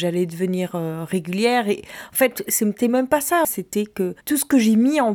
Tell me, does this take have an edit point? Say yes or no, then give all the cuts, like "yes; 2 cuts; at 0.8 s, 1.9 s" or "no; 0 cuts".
yes; 1 cut; at 3.4 s